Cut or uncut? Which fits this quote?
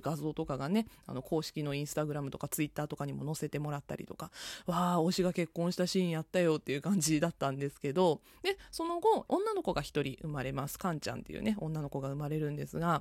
cut